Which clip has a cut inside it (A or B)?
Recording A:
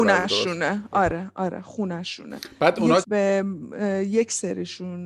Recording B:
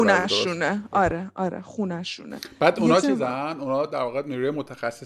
A